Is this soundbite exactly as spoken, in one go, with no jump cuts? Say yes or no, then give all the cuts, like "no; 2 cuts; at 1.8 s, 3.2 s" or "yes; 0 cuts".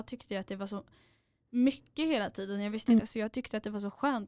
no; 1 cut; at 3.0 s